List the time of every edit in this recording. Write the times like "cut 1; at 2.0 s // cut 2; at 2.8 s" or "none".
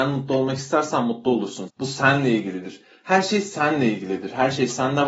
cut 1; at 1.7 s